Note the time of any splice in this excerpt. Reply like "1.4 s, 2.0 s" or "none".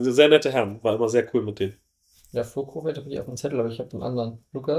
none